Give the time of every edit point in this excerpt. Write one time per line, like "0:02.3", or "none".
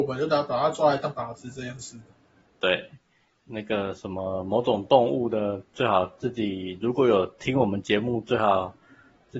none